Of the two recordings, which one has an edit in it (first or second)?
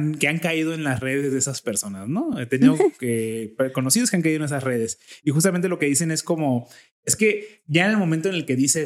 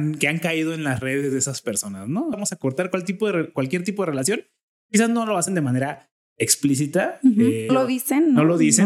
second